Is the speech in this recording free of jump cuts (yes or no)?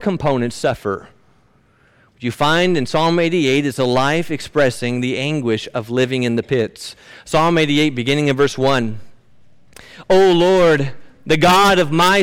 yes